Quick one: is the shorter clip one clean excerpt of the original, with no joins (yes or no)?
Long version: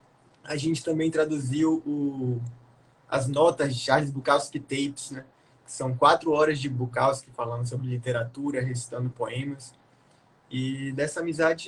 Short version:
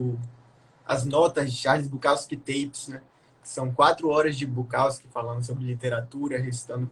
yes